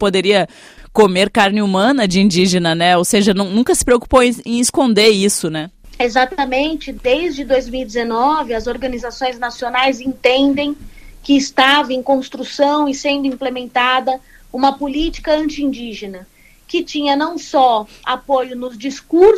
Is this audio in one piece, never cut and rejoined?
yes; 0 cuts

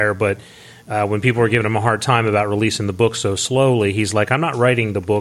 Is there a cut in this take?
no; 0 cuts

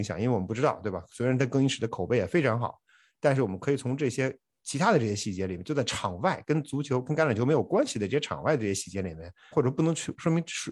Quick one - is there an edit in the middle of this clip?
yes; 1 cut; at 9.5 s

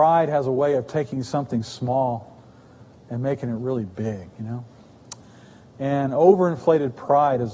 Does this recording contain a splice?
no; 0 cuts

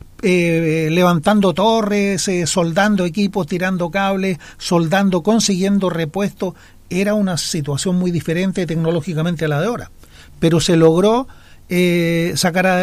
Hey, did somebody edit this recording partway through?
no; 0 cuts

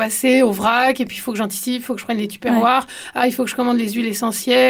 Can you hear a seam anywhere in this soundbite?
no; 0 cuts

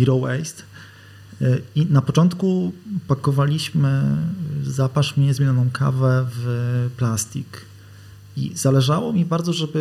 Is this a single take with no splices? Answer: yes; 0 cuts

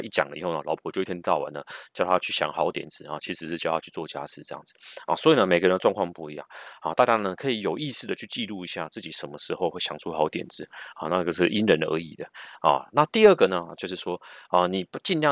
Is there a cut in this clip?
no; 0 cuts

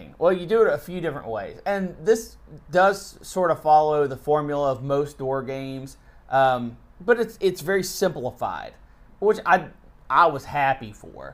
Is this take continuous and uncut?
yes; 0 cuts

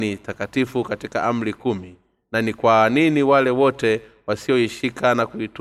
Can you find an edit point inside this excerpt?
no; 0 cuts

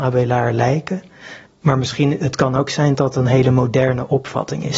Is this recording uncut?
no; 2 cuts; at 1.5 s, 2.9 s

